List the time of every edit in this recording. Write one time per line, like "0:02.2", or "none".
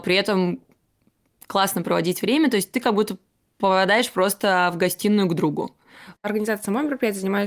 0:06.2